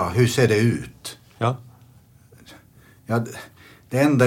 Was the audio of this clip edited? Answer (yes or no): no